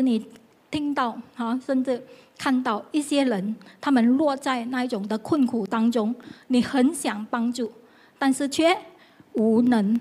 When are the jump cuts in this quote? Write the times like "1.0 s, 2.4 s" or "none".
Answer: none

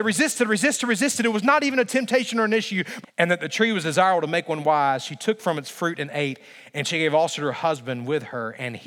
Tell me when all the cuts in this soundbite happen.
3.0 s

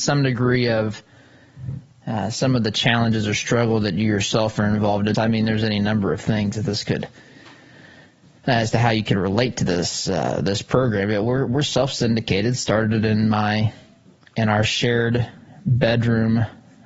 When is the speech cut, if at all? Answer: 5.1 s

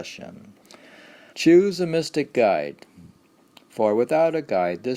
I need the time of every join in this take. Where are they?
1.3 s

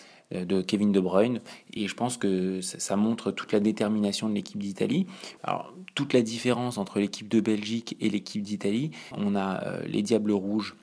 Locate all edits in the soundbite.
1.8 s, 5.4 s, 9.1 s

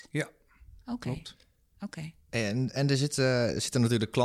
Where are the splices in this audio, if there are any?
none

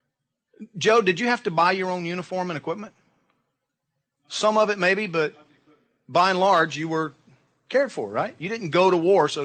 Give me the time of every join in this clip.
none

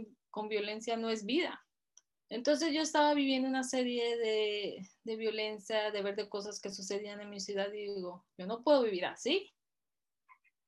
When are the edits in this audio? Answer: 2.1 s

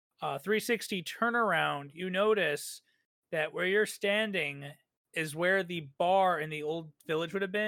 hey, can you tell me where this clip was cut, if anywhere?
none

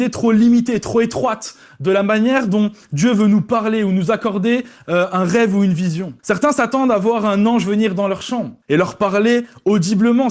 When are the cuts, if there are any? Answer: 6.2 s, 8.6 s

